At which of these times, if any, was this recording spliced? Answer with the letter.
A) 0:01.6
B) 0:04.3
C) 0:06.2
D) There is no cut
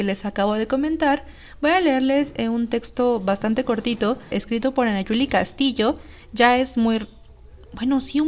B